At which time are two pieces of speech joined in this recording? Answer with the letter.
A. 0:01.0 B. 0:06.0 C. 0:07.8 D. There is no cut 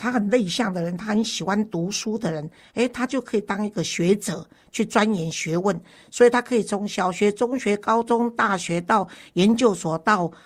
D